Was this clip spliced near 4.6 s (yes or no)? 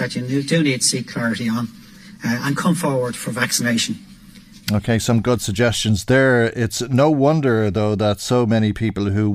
yes